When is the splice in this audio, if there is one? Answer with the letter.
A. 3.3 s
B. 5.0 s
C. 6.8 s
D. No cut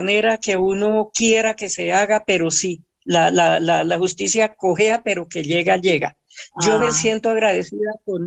D